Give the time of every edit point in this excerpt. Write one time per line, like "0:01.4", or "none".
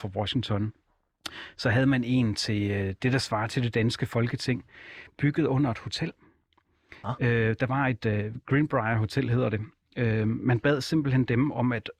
none